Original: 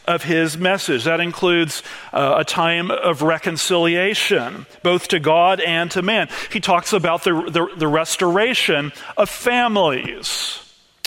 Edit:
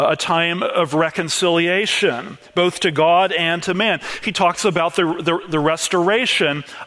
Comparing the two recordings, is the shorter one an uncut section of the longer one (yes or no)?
yes